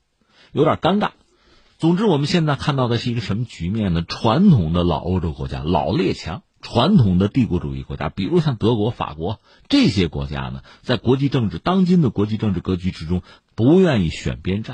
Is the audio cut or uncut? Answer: cut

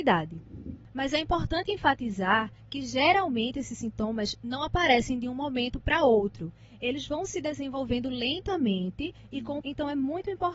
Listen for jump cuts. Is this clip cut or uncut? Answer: cut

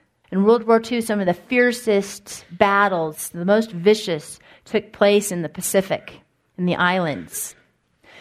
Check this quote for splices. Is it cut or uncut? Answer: uncut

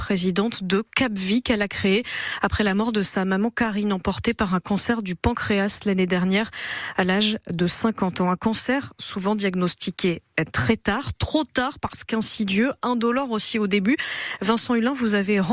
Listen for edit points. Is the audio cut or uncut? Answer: uncut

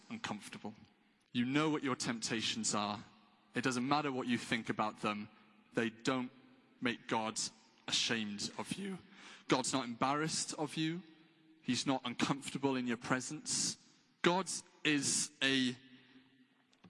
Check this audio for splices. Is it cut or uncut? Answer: cut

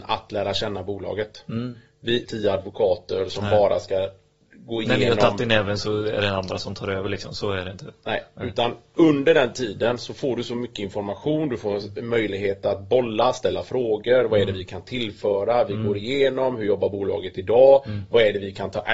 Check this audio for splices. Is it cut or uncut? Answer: cut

